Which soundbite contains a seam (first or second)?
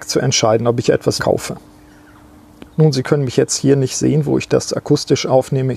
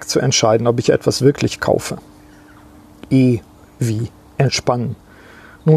first